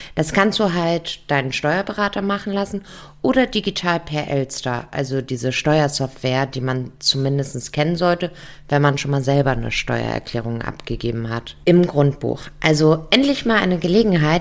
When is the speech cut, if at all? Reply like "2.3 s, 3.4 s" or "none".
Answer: 11.6 s